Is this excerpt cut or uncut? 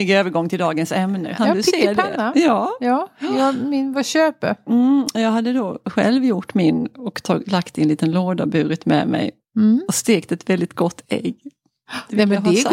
cut